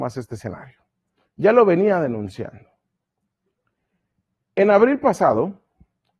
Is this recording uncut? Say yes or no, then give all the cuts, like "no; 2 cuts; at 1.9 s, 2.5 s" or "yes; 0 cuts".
yes; 0 cuts